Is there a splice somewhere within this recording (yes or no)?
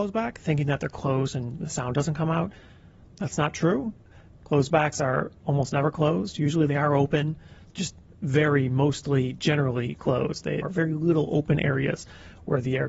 yes